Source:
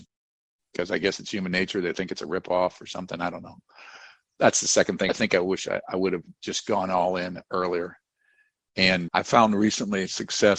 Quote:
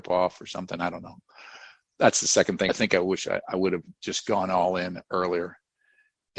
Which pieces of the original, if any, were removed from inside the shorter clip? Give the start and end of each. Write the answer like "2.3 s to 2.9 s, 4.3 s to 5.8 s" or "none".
none